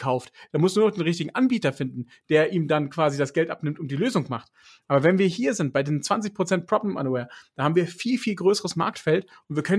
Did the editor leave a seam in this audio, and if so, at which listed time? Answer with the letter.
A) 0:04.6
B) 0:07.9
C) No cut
C